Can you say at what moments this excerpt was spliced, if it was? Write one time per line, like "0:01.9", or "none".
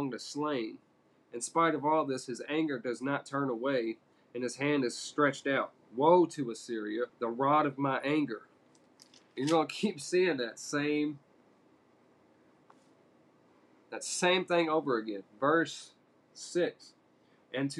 0:07.1